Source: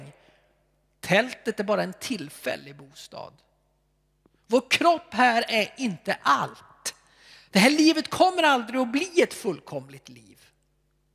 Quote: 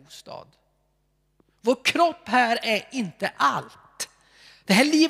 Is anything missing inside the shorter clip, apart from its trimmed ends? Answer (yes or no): no